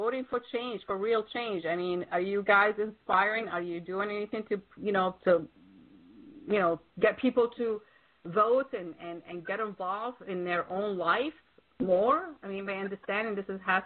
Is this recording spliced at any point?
yes; 1 cut; at 6.9 s

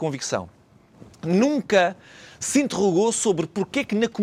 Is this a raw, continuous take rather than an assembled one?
yes; 0 cuts

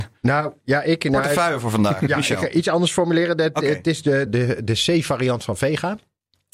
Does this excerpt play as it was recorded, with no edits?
no; 1 cut; at 4.3 s

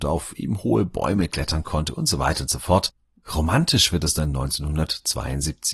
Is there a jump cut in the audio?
yes; 1 cut; at 3.2 s

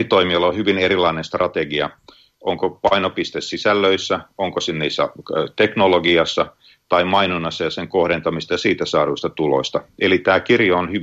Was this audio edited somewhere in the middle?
no; 0 cuts

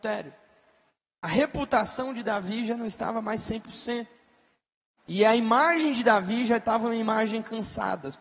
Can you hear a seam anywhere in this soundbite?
yes; 1 cut; at 5.0 s

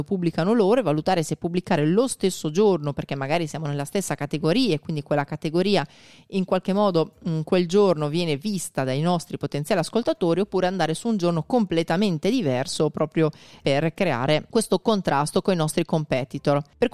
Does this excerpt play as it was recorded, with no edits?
yes; 0 cuts

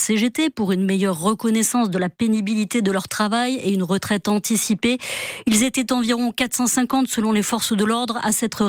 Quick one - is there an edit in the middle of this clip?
no; 0 cuts

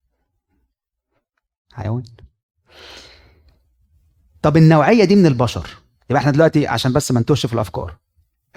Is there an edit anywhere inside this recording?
no; 0 cuts

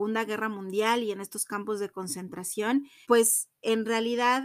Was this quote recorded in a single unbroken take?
no; 1 cut; at 3.0 s

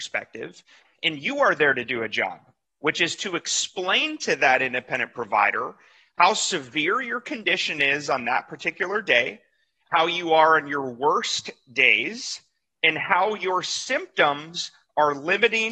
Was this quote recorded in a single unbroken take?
yes; 0 cuts

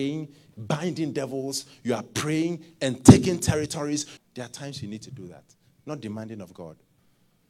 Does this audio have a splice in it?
yes; 1 cut; at 4.2 s

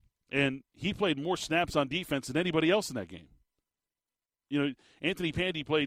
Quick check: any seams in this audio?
no; 0 cuts

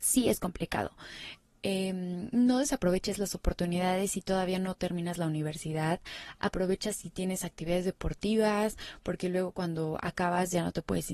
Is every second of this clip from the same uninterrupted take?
yes; 0 cuts

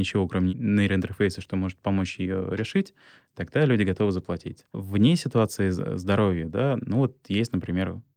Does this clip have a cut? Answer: no; 0 cuts

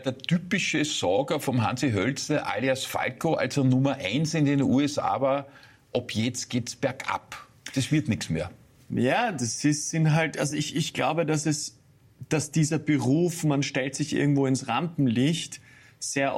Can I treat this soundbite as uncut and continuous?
yes; 0 cuts

